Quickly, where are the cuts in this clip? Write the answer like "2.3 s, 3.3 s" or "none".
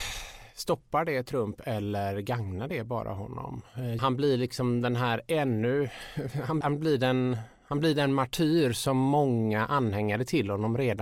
4.0 s, 6.6 s